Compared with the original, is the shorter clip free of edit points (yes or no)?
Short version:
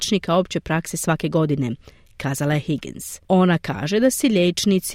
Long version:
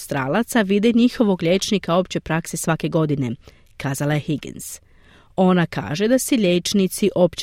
no